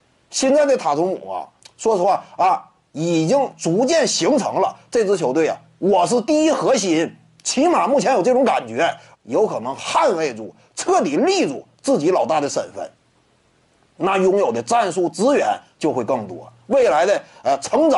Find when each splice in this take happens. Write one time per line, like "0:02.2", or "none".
0:01.6
0:09.1